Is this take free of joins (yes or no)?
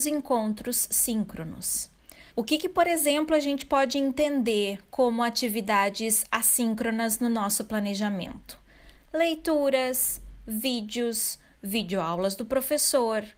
no